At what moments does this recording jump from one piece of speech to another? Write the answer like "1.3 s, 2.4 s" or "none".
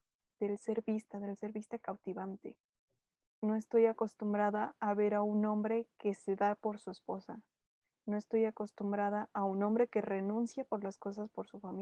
3.2 s